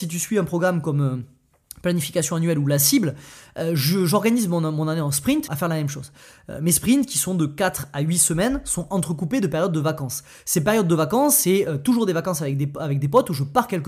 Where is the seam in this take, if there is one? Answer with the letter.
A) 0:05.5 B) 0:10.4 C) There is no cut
A